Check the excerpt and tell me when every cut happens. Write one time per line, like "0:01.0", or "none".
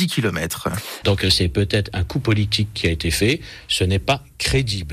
0:01.0